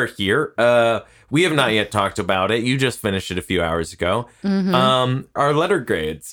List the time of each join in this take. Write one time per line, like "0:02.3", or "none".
0:05.4

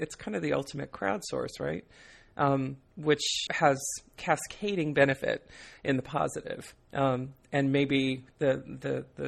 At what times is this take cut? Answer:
0:02.3
0:03.5

